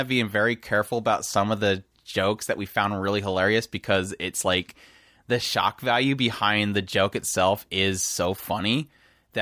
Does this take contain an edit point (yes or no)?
no